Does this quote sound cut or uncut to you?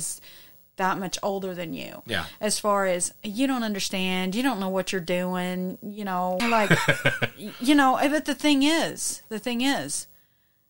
cut